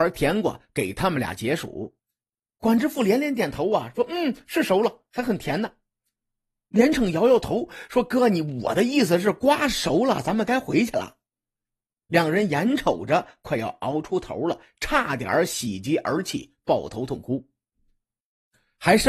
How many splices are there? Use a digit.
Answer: 1